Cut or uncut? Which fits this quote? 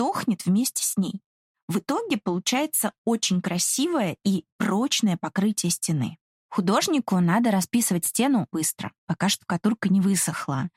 cut